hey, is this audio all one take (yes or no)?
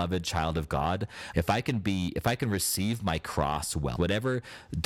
no